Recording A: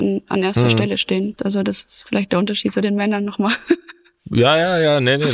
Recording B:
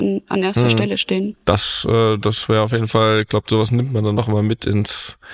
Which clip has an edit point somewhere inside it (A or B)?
A